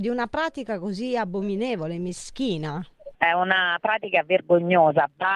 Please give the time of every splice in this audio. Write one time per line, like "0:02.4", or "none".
0:03.1